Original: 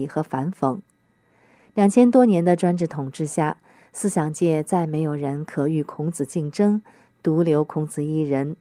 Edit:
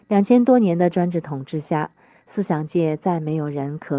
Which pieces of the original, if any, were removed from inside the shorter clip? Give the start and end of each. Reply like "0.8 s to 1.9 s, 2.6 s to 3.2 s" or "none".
none